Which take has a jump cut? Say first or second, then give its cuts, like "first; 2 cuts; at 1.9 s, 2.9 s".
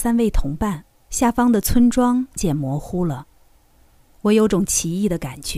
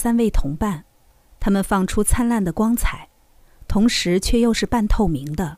first; 2 cuts; at 1.1 s, 2.4 s